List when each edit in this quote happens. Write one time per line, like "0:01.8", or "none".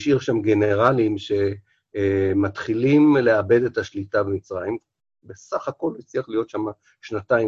none